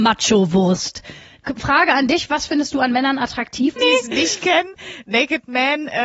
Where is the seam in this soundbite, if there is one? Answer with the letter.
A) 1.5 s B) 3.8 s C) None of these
B